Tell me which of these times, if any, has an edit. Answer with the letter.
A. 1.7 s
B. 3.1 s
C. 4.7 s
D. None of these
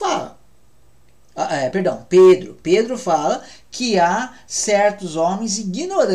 D